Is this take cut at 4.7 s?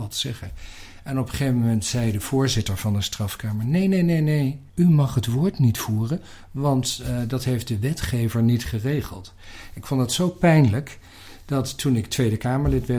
yes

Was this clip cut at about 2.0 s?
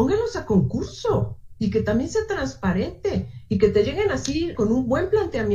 no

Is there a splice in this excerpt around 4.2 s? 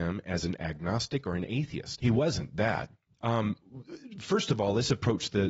no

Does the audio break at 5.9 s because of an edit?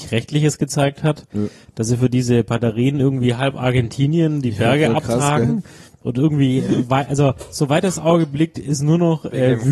no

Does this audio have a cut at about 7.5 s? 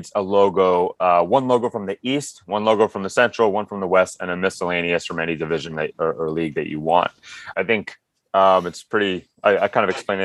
yes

